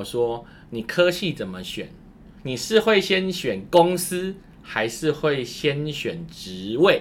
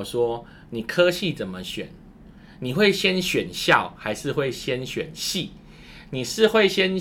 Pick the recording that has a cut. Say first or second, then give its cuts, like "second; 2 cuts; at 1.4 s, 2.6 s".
first; 1 cut; at 2.4 s